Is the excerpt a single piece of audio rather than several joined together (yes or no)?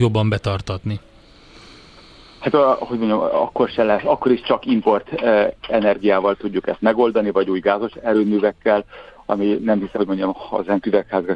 no